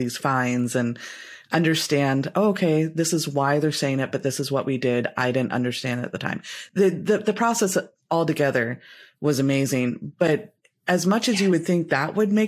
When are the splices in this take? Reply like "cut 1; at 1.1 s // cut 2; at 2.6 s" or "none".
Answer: none